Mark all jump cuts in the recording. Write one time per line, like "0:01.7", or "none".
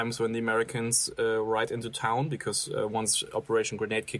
none